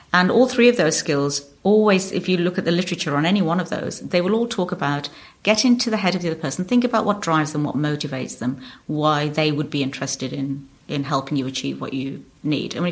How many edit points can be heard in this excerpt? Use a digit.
0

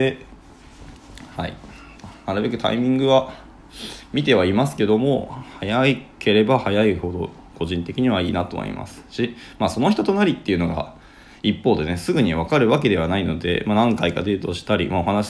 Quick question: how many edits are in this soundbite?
0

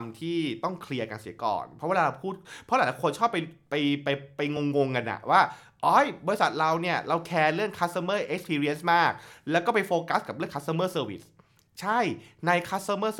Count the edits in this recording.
0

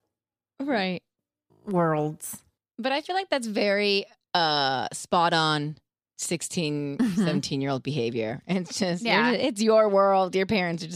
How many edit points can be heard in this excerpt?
0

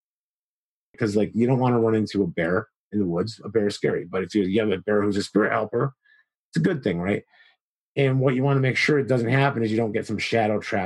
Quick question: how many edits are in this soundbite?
2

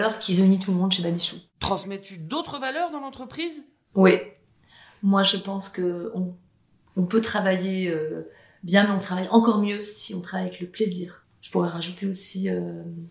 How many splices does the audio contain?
1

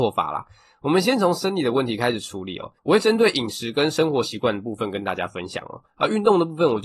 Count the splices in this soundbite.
1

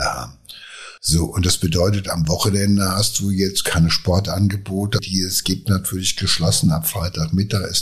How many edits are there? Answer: 2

